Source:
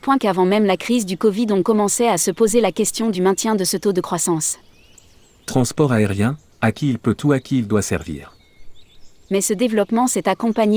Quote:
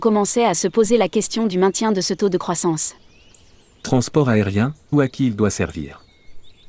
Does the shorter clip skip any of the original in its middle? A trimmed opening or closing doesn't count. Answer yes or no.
yes